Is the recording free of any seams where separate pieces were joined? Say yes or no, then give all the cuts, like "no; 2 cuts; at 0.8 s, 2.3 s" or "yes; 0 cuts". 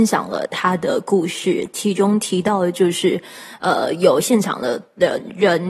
yes; 0 cuts